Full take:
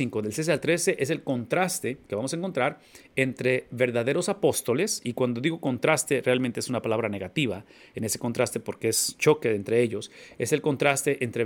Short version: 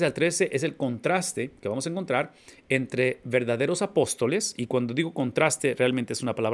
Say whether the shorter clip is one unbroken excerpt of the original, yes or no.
yes